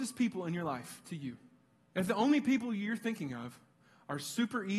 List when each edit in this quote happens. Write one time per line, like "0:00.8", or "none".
0:01.9